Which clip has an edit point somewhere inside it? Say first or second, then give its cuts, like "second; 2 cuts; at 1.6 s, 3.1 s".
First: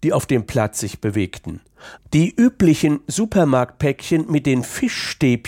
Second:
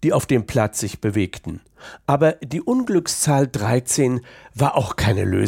first; 1 cut; at 2.0 s